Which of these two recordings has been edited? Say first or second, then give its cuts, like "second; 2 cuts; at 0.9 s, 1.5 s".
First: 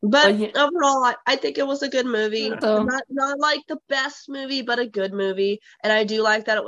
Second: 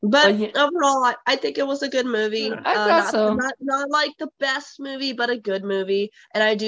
first; 1 cut; at 2.6 s